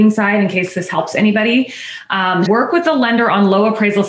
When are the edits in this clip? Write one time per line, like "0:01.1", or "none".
0:02.5